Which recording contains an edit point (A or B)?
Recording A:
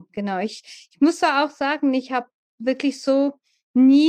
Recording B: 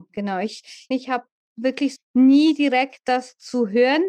B